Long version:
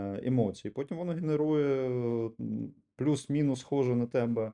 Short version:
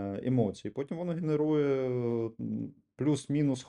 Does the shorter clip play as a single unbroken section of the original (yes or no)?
yes